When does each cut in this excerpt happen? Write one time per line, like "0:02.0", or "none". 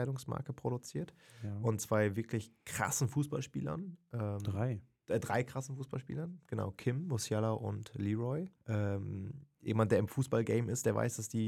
0:08.6